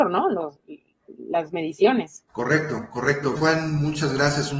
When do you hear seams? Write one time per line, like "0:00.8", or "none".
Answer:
0:02.3
0:03.4